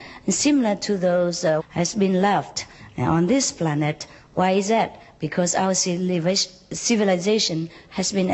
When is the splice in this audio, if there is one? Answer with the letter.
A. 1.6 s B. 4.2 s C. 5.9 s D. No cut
A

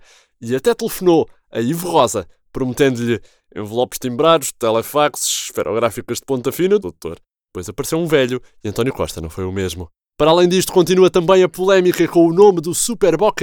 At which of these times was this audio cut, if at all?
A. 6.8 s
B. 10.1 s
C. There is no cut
A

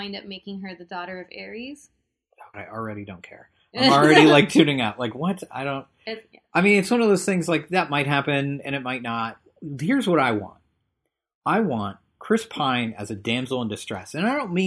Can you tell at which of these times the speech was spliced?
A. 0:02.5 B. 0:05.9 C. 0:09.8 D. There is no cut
A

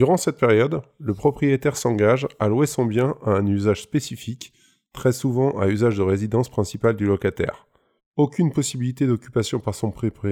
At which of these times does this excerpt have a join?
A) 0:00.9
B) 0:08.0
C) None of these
B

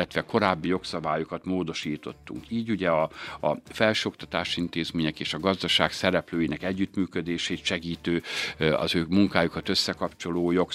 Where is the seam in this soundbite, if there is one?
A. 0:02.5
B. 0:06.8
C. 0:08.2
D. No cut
D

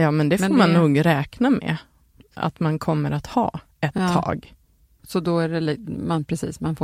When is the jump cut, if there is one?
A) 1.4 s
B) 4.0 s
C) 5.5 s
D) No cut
D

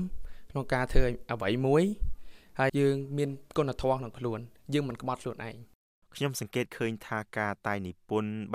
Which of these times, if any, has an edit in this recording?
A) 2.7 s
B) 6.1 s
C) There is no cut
A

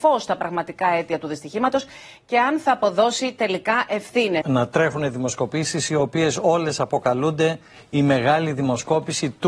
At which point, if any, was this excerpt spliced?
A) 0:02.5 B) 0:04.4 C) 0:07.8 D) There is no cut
B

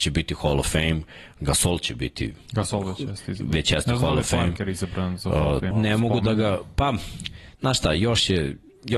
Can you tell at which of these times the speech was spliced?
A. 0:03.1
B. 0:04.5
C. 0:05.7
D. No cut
C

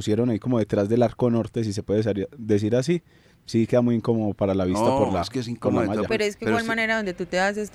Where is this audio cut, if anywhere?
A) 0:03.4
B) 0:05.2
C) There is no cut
C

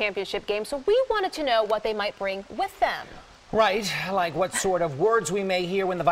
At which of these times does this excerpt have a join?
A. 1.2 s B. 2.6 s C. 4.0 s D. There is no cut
D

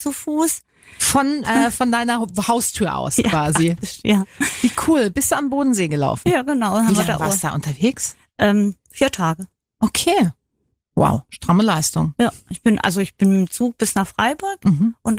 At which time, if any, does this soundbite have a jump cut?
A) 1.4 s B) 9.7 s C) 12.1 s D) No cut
A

